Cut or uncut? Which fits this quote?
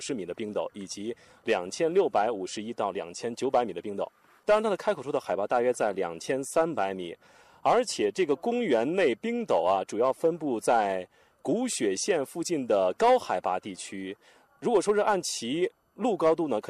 cut